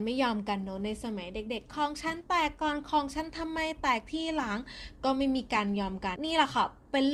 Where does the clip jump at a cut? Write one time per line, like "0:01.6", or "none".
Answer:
0:06.2